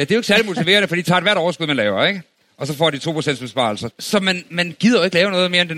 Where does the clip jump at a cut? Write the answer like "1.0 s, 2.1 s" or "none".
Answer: 3.9 s

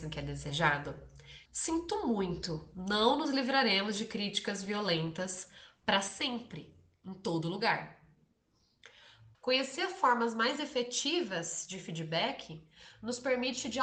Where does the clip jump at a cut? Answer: 1.5 s, 9.3 s

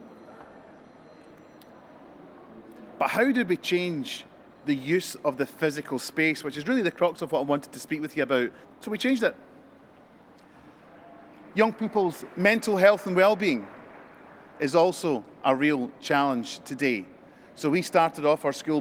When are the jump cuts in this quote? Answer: 8.6 s

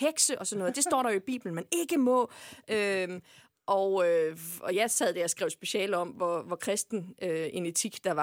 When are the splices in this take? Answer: none

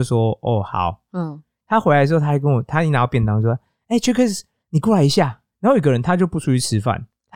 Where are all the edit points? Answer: 1.1 s, 5.5 s

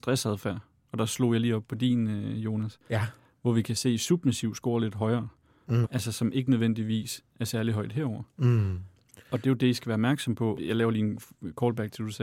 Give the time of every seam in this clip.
5.8 s, 10.6 s

